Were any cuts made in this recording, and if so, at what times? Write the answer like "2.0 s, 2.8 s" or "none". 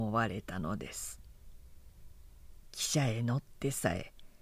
2.6 s